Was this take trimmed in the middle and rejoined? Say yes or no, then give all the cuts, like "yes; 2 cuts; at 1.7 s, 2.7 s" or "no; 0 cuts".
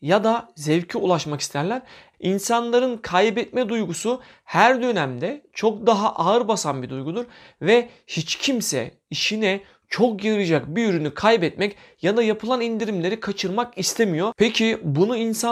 yes; 1 cut; at 2.1 s